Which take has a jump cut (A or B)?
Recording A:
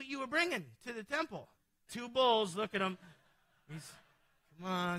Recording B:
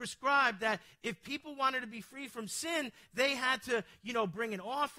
A